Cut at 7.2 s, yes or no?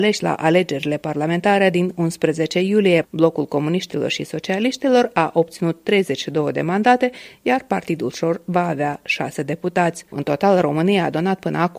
no